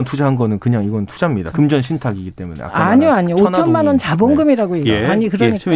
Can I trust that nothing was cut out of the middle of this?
no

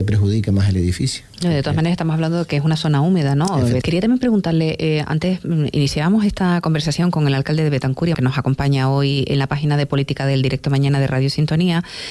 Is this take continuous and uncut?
no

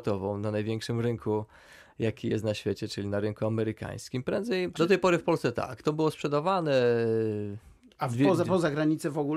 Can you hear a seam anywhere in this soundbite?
yes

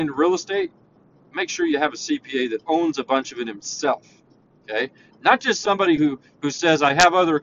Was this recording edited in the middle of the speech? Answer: no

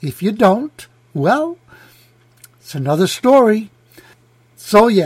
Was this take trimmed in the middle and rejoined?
no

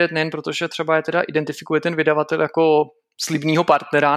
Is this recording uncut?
yes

